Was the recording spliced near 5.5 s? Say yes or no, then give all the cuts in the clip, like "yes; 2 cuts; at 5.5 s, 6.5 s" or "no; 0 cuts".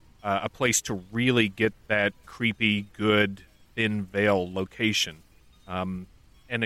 no; 1 cut; at 3.7 s